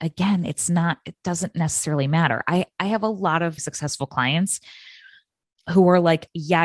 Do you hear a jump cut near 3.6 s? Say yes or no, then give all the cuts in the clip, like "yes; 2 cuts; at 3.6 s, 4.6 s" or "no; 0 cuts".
yes; 1 cut; at 3.6 s